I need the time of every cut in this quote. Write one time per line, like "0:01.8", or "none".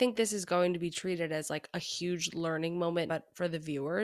0:03.1